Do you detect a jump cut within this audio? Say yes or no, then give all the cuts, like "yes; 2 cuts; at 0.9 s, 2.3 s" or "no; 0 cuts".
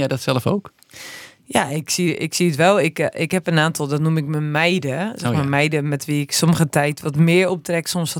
no; 0 cuts